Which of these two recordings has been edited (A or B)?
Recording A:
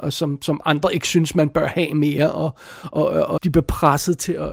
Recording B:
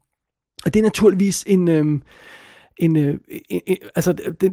A